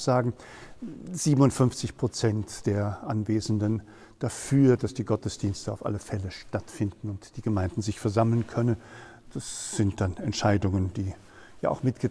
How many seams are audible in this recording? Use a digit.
0